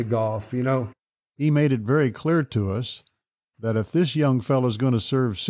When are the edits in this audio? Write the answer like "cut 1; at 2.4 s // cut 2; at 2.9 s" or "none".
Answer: cut 1; at 1.3 s